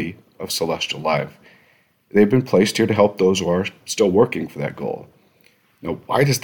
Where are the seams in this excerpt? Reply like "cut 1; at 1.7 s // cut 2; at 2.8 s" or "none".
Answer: none